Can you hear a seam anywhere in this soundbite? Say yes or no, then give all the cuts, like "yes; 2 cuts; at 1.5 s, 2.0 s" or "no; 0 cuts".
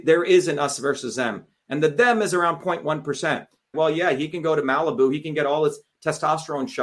yes; 1 cut; at 3.7 s